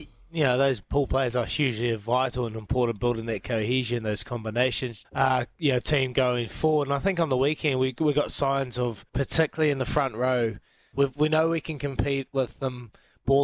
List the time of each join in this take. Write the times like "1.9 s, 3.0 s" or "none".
5.0 s, 9.1 s, 10.9 s